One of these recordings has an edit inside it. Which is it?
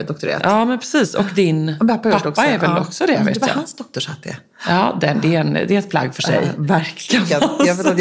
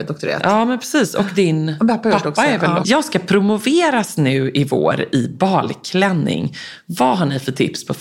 second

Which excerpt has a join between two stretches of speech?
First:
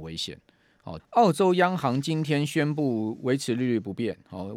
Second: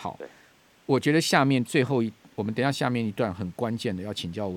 first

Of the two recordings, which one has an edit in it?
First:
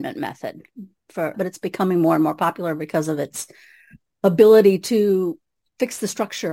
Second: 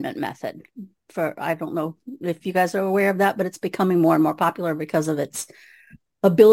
first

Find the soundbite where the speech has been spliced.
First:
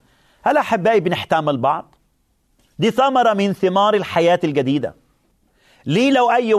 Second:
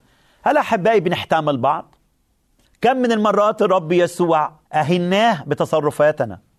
second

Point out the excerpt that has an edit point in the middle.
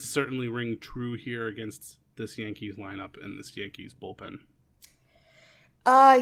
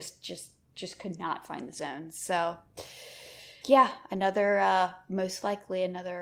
second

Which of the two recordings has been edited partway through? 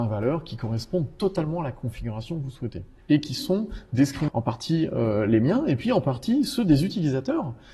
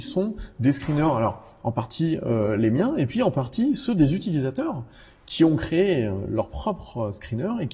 first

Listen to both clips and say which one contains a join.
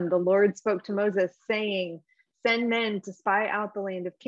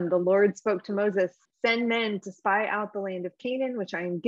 second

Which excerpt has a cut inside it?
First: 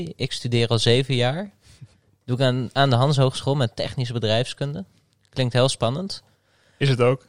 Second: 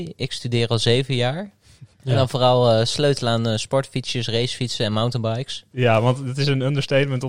second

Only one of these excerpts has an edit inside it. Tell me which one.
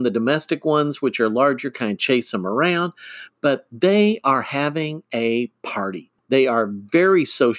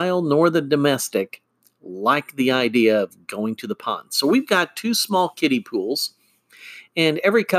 first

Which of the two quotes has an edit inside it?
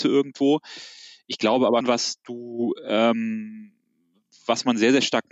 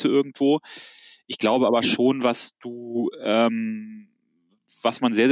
first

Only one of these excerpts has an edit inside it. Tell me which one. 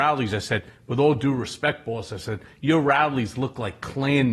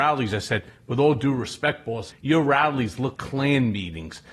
second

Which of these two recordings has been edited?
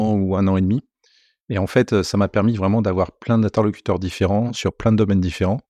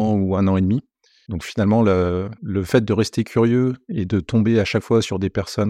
second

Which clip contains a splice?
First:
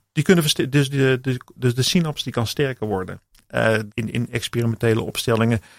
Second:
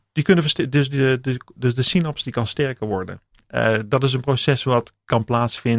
first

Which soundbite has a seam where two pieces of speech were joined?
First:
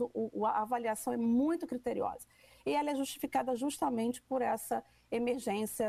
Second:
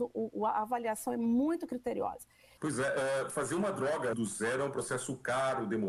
second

